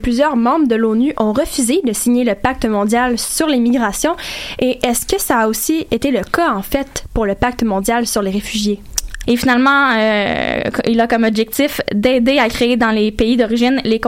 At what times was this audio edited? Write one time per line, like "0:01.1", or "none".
0:09.2

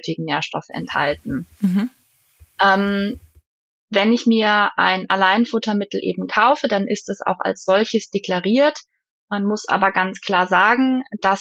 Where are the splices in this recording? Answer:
none

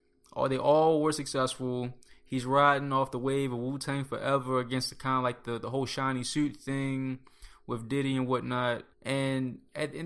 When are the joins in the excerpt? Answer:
0:08.9

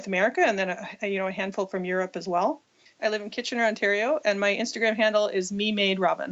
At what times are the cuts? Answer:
0:03.0

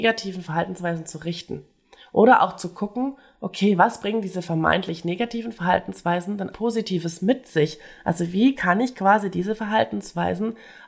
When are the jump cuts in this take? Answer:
0:06.5

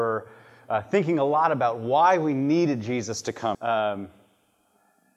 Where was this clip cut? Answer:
0:03.5

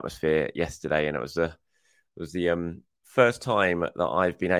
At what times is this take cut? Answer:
none

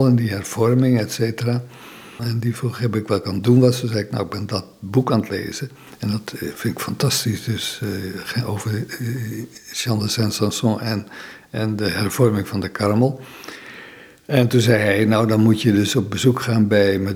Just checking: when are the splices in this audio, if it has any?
0:02.2

